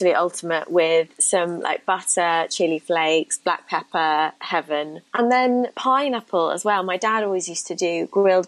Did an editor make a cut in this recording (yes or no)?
no